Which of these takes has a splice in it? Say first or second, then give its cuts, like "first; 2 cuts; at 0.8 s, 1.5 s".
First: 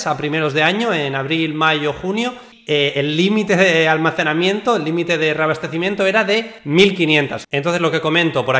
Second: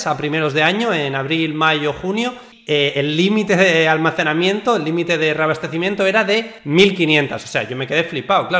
first; 1 cut; at 7.4 s